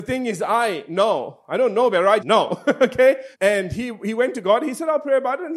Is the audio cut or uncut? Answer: cut